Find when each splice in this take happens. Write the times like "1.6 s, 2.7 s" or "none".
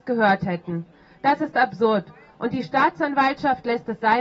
none